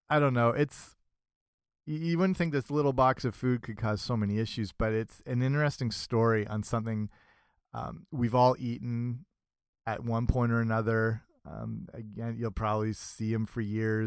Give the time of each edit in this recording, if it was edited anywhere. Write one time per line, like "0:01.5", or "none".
none

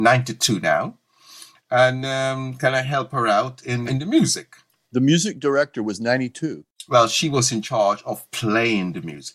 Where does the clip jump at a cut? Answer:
0:03.9

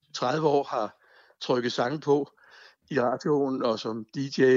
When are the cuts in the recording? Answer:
none

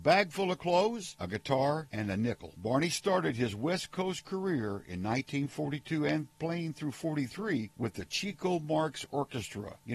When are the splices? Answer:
0:01.9

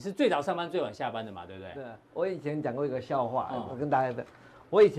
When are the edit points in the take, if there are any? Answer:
none

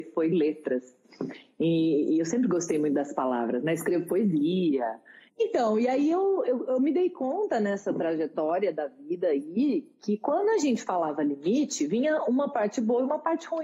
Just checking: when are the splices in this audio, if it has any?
0:05.3

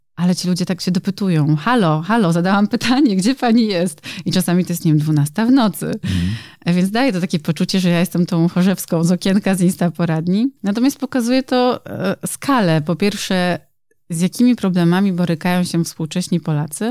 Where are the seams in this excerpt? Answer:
0:10.6

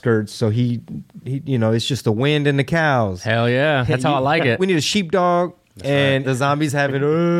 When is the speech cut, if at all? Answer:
0:04.6
0:06.2

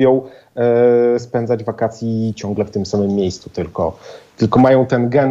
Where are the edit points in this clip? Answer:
none

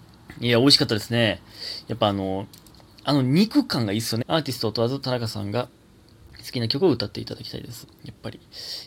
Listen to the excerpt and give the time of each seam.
0:04.2
0:07.8

